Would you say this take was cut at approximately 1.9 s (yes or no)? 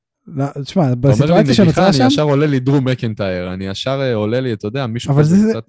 no